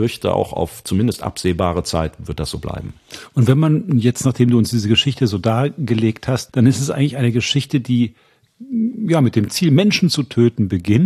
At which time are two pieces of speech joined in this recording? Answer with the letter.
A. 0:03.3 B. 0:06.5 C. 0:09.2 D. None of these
B